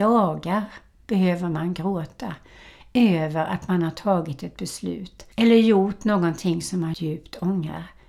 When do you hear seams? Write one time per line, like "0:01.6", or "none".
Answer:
0:05.3
0:06.9